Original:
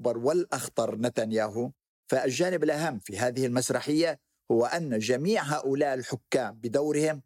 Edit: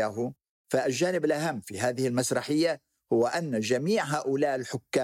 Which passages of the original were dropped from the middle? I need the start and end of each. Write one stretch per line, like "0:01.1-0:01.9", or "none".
none